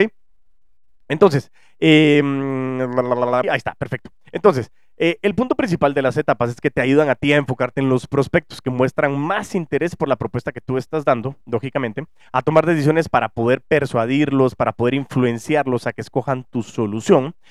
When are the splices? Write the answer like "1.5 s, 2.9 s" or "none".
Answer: 3.4 s